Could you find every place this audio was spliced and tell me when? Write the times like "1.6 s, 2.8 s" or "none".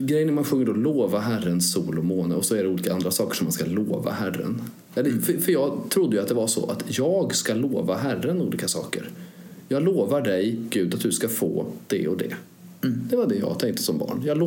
none